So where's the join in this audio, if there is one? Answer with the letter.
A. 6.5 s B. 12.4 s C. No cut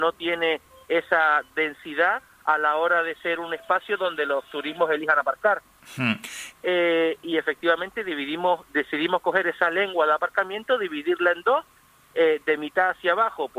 A